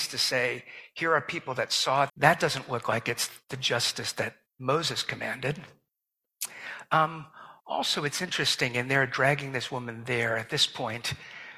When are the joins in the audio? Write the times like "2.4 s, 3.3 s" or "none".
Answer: 2.1 s